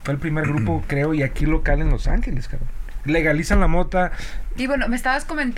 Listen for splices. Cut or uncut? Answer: cut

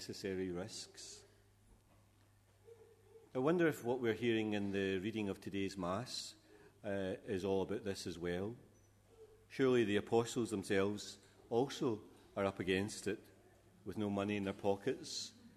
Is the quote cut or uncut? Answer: cut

